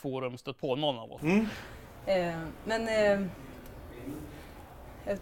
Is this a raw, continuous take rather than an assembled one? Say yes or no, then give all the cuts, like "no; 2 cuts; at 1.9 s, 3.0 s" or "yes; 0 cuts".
no; 1 cut; at 1.2 s